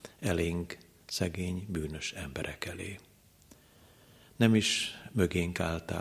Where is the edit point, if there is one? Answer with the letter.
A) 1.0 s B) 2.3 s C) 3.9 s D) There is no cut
D